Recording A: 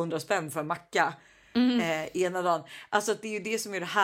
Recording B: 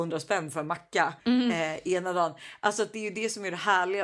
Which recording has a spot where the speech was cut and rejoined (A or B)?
B